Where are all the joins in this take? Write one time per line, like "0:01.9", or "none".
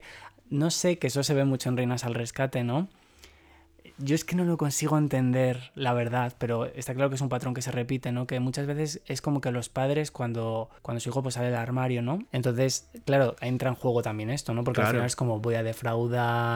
0:10.8
0:12.3